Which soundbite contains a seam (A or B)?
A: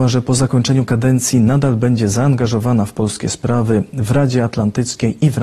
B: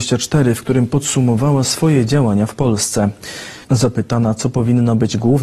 B